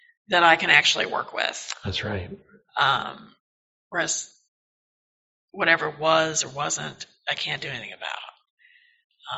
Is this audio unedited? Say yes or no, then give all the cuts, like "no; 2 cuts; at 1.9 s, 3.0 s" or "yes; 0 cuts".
yes; 0 cuts